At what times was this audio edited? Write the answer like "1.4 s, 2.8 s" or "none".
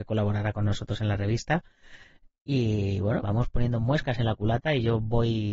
3.2 s